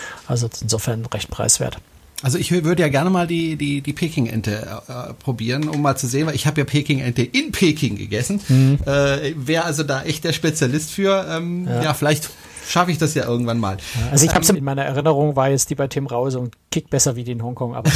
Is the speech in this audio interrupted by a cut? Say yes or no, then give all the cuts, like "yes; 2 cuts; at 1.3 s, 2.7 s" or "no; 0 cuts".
yes; 1 cut; at 14.5 s